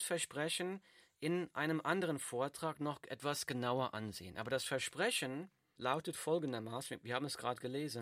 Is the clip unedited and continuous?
no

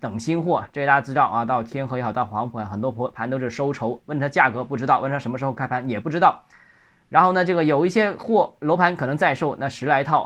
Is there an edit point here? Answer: no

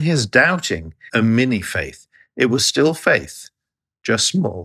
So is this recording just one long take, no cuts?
no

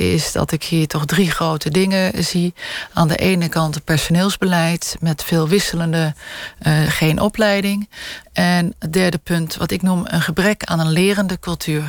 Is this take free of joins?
no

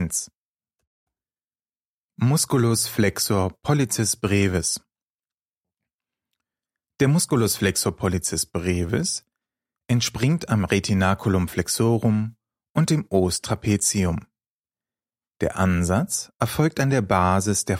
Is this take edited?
no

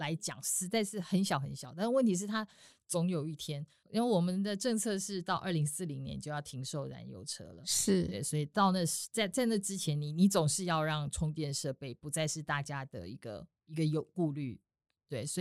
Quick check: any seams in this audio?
no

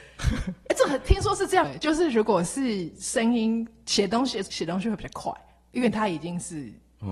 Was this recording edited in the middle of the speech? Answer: yes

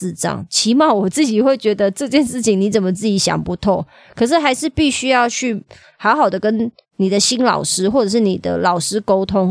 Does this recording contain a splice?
no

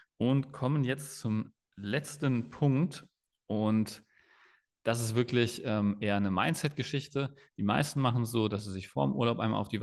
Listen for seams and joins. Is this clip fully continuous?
yes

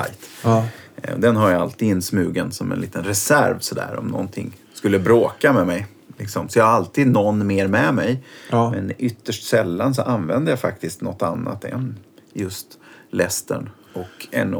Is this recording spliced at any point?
no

